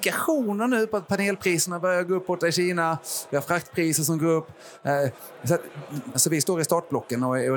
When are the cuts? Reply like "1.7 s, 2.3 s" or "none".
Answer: 6.1 s